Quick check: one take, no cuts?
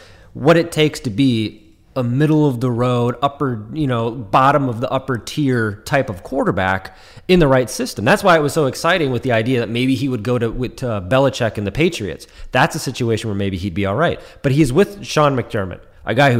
yes; 0 cuts

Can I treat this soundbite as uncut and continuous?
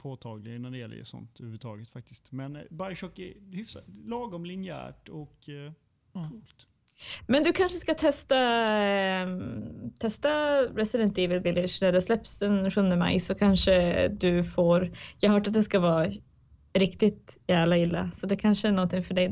no; 1 cut; at 6.0 s

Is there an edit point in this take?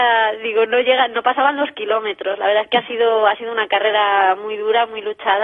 no; 0 cuts

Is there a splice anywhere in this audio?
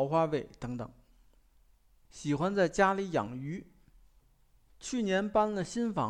yes; 1 cut; at 2.1 s

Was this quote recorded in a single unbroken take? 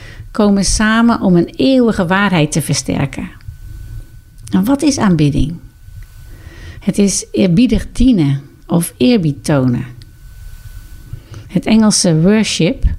no; 1 cut; at 4.4 s

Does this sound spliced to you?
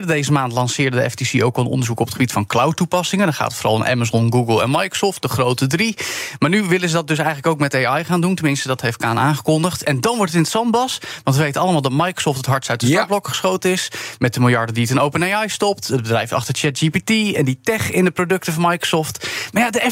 no; 0 cuts

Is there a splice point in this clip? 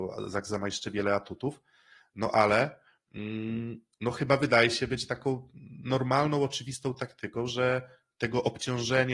no; 0 cuts

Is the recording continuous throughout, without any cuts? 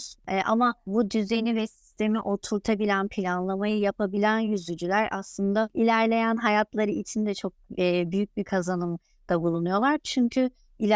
yes; 0 cuts

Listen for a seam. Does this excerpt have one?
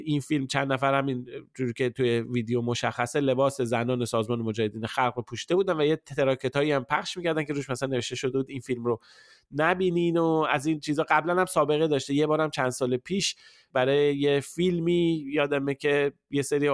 no; 0 cuts

